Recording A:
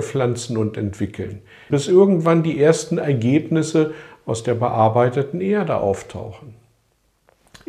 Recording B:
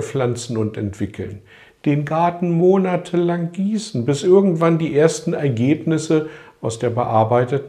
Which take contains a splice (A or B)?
A